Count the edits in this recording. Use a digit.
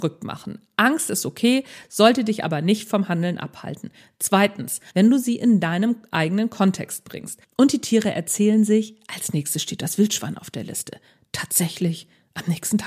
2